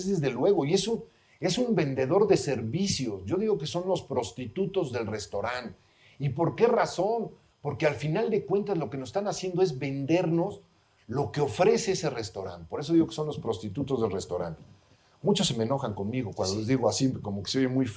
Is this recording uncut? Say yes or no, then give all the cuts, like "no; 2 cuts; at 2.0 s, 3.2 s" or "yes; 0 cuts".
yes; 0 cuts